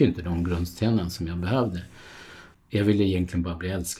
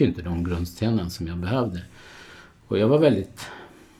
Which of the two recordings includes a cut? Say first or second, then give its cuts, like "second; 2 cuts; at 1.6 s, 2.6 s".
first; 1 cut; at 2.5 s